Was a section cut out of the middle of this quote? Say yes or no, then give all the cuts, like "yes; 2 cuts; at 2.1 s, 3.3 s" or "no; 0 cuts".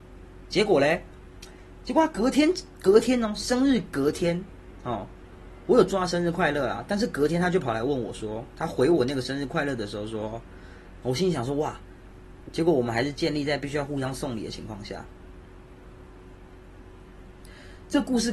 yes; 2 cuts; at 11.0 s, 12.4 s